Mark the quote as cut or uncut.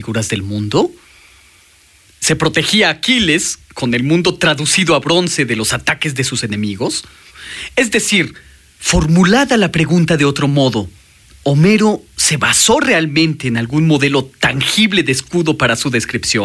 uncut